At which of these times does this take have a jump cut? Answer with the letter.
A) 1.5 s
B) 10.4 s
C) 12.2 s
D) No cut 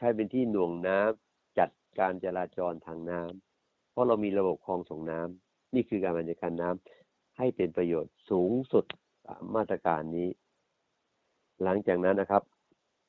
C